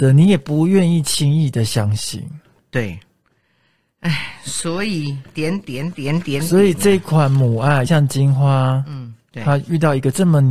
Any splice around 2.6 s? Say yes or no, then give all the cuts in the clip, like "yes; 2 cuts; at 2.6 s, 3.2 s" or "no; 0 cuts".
no; 2 cuts; at 7.9 s, 9.3 s